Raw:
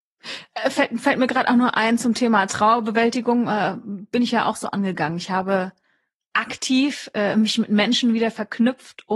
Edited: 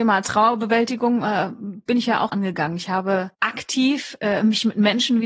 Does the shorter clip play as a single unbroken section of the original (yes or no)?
no